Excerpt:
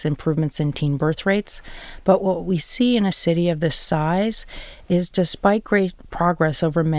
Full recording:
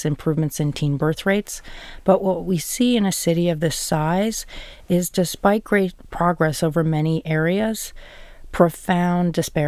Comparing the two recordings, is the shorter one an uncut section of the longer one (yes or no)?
yes